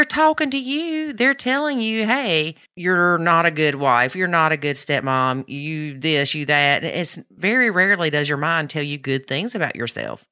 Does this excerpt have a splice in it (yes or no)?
no